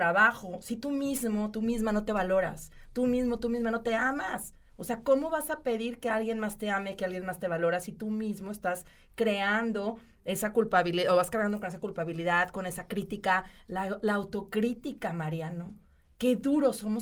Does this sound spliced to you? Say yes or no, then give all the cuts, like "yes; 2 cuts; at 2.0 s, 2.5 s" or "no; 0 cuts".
no; 0 cuts